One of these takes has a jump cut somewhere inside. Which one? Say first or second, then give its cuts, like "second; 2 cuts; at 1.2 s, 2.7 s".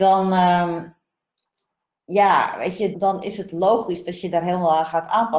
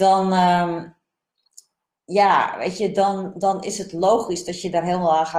first; 1 cut; at 2.9 s